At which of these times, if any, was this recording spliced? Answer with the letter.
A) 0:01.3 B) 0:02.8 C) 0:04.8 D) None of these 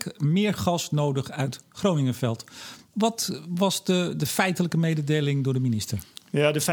D